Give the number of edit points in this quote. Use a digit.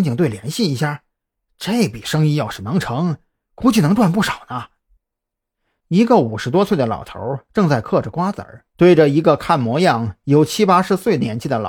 1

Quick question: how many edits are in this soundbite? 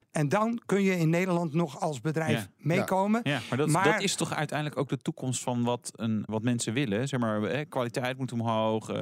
1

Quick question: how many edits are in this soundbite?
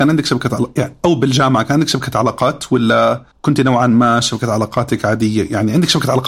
1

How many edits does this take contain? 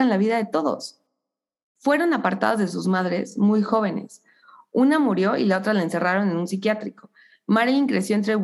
0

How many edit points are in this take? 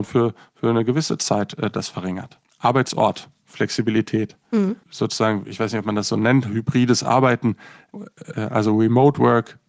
1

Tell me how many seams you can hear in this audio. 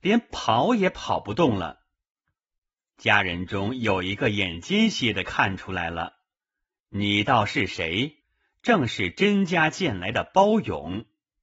2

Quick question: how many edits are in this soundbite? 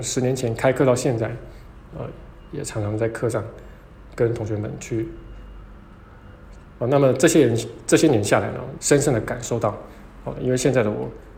3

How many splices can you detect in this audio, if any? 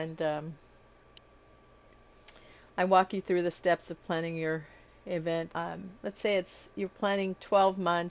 1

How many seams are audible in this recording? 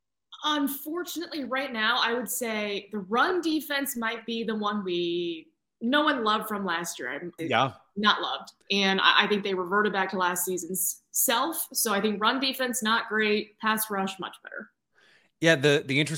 2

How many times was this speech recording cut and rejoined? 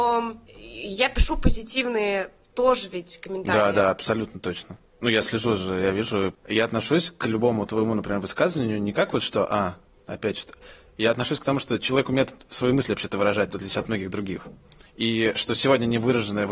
0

